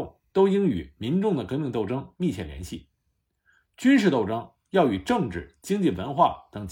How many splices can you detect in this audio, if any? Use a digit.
0